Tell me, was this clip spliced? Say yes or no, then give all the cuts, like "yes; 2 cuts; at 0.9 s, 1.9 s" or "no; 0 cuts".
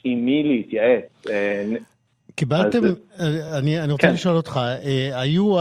no; 0 cuts